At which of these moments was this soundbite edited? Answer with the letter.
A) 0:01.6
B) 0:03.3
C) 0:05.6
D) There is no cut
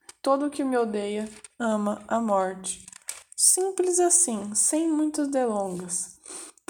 D